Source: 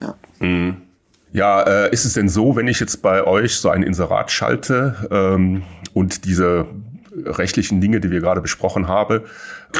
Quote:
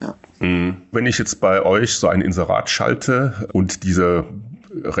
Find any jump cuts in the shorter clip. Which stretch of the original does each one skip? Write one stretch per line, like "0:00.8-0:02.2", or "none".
0:00.9-0:02.5
0:05.1-0:05.9

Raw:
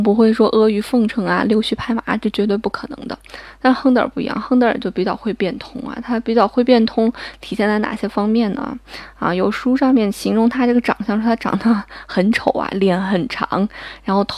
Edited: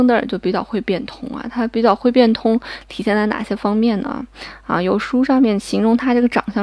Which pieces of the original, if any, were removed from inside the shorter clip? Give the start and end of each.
none

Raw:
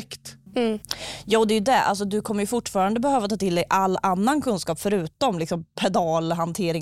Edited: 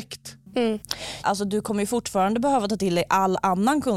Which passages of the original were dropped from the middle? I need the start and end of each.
0:01.2-0:01.8

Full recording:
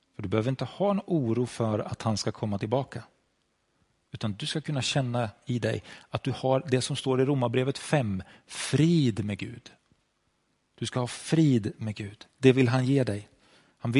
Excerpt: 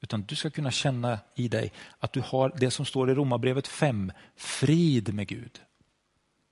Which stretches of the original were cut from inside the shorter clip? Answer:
none

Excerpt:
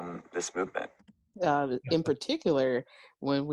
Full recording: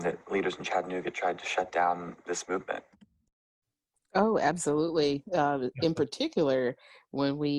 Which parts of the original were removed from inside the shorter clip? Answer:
0:03.3-0:05.3

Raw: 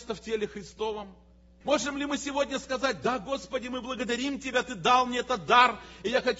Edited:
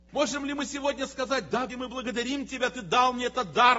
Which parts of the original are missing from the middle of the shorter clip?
0:03.2-0:03.6

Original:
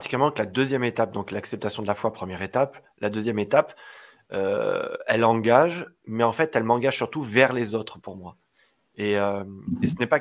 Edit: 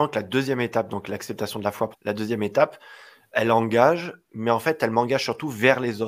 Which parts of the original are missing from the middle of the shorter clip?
0:02.1-0:02.9
0:04.3-0:05.0

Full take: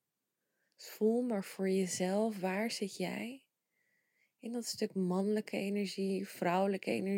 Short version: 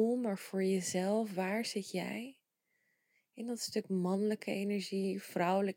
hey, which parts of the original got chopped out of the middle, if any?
none

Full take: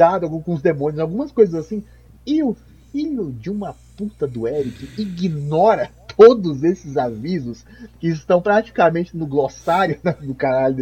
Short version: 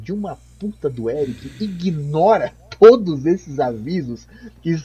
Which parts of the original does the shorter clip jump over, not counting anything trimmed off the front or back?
none

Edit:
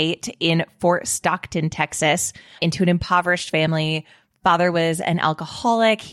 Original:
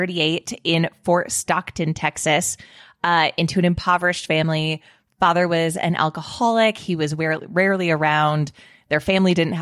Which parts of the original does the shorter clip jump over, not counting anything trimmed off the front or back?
0:02.8-0:03.3

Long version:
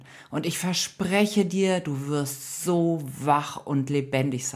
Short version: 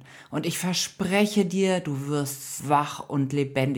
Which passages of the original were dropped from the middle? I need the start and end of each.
0:02.6-0:03.2

